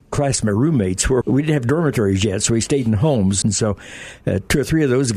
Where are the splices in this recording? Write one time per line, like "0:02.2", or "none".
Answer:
0:01.2
0:03.4